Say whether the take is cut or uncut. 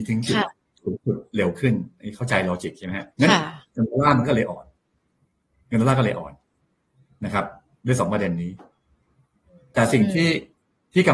cut